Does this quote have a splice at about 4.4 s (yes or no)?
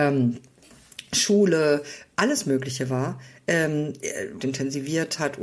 yes